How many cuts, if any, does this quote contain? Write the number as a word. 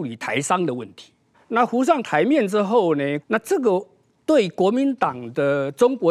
two